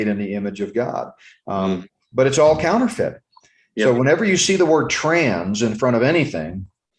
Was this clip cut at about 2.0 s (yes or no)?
no